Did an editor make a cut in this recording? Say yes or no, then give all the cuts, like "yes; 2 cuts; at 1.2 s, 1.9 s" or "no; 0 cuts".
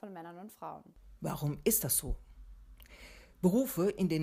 yes; 1 cut; at 1.2 s